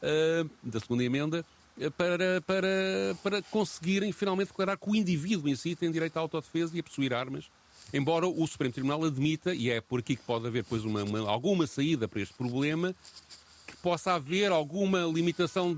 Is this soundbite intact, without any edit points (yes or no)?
yes